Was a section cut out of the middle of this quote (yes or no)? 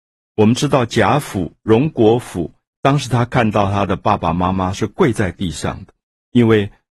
yes